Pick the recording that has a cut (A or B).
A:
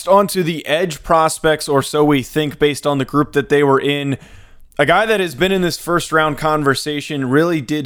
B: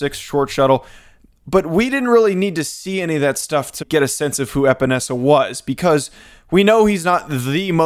B